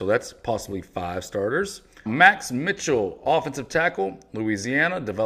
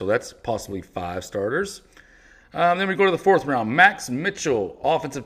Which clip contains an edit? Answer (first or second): first